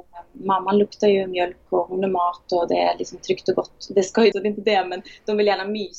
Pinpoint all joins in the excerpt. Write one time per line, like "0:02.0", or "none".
0:04.3